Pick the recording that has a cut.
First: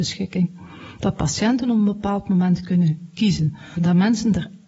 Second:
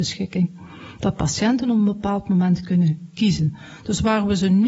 first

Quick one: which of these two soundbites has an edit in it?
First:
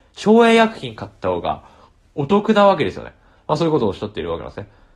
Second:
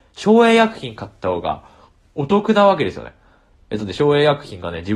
first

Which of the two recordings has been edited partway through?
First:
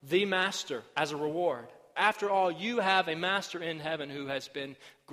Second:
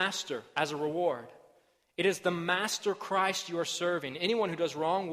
first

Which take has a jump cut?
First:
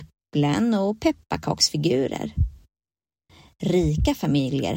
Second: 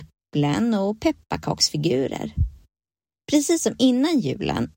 second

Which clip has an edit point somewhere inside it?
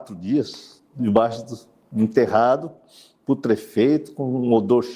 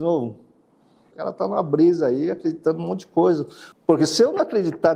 second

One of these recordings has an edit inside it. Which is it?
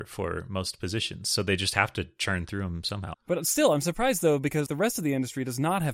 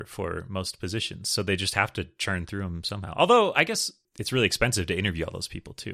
first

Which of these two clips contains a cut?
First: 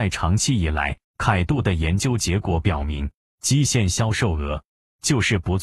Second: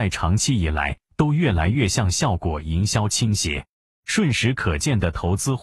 first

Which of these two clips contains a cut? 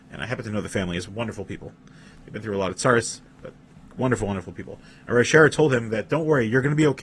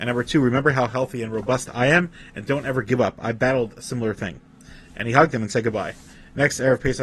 first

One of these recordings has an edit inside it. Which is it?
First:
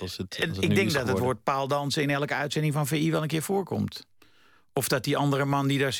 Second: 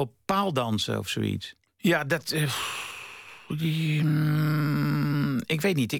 second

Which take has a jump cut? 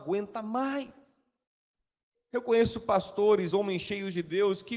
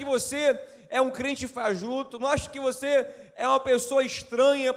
first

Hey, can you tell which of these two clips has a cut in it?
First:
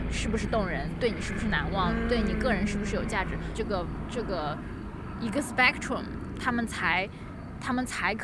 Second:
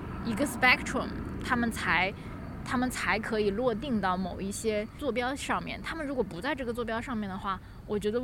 first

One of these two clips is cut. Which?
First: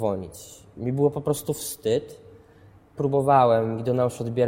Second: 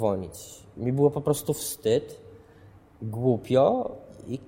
first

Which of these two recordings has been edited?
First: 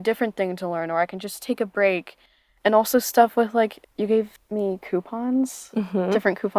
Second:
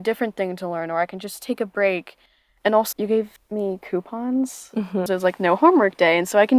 second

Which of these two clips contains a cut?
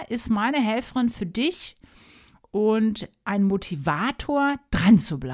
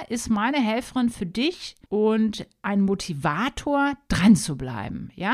second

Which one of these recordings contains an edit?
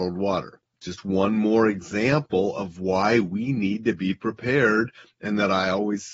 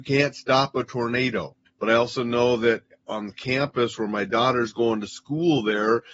second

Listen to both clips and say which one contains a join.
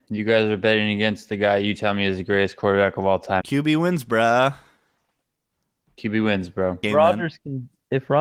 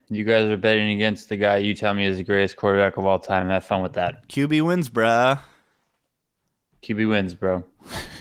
first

